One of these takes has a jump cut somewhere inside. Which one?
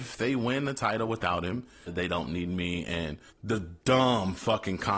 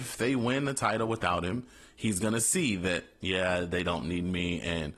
first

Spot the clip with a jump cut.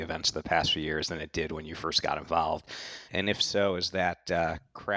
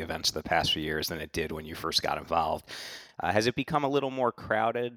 first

